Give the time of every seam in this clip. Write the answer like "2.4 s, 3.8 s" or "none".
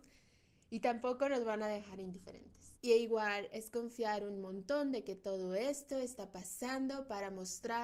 2.8 s